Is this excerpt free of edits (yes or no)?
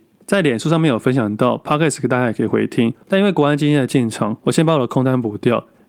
no